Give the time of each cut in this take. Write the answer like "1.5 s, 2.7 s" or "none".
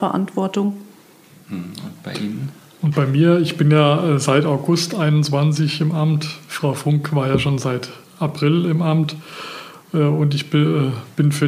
none